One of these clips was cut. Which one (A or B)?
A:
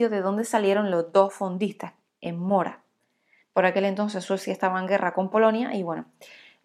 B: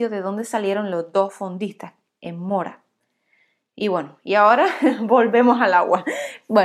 A